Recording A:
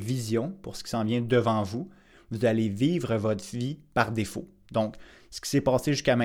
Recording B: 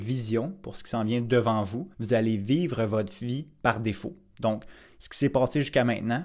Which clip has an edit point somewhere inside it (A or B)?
B